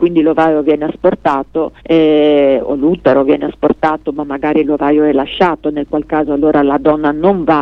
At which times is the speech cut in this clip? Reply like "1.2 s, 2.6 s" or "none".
1.8 s